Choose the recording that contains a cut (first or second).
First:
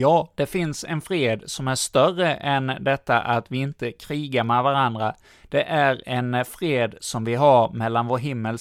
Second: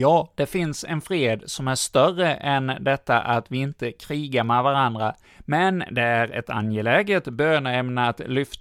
second